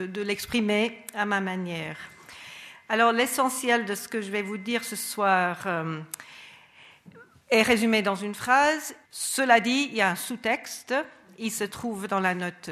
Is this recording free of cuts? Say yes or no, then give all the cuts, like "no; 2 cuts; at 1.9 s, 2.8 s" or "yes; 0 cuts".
no; 1 cut; at 9.0 s